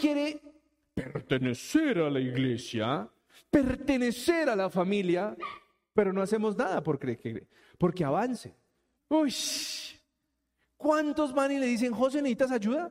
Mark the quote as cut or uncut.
cut